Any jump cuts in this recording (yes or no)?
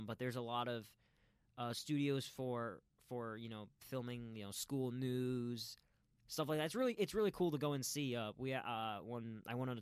no